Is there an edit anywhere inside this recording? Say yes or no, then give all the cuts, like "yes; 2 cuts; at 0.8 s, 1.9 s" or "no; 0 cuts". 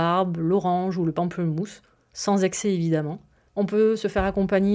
yes; 1 cut; at 3.5 s